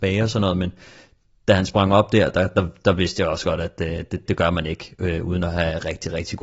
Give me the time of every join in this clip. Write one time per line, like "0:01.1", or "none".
0:04.3